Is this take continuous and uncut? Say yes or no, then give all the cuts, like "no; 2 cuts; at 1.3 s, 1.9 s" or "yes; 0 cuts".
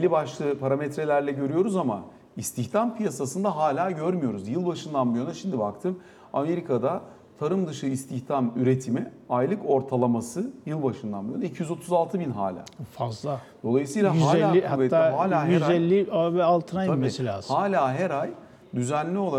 yes; 0 cuts